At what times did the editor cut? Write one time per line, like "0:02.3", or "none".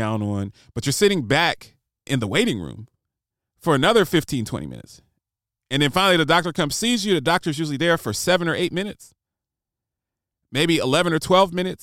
0:02.1